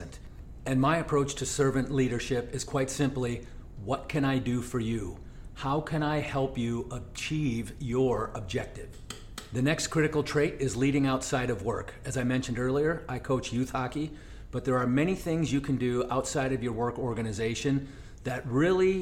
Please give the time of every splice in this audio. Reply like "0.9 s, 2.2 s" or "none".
none